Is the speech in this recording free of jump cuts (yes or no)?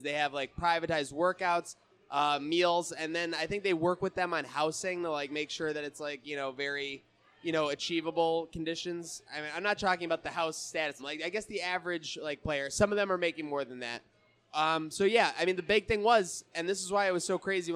no